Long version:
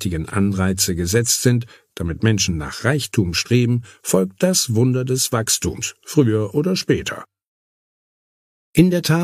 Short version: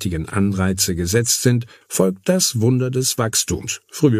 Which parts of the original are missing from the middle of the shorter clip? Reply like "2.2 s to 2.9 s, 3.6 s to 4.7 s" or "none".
1.8 s to 4.0 s